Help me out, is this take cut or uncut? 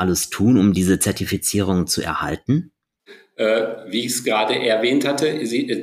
uncut